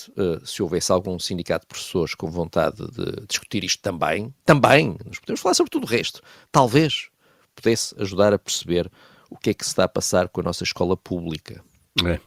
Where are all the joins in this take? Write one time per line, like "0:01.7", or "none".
0:06.4

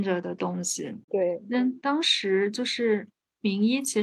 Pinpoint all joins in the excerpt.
0:01.1

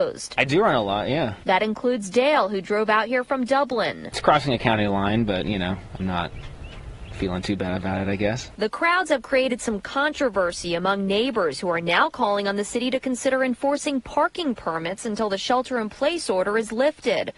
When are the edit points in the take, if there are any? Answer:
none

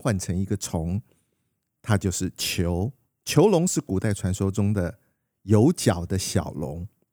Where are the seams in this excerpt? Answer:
none

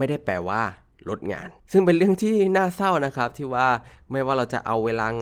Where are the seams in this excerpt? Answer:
0:01.6

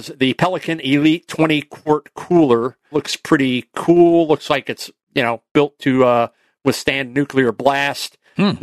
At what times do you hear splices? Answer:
0:02.9

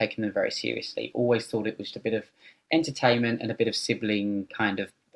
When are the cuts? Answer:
0:01.9

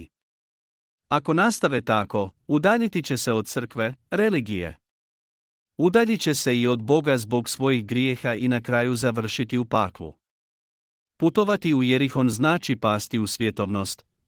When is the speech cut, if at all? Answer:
none

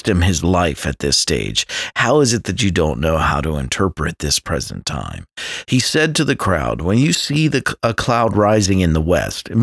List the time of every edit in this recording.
0:01.9
0:05.6

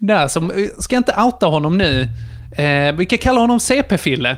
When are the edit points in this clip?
none

